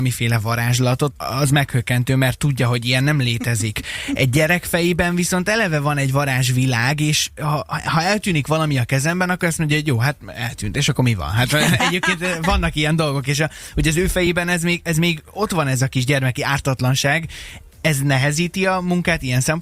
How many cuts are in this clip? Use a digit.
1